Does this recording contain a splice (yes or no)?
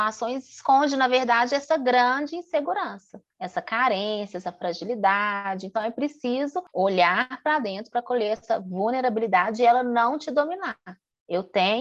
no